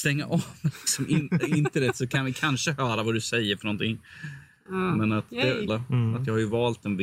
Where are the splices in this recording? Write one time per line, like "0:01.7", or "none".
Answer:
0:05.7